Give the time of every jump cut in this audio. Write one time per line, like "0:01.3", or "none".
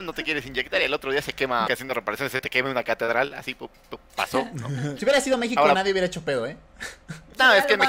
0:01.6
0:05.0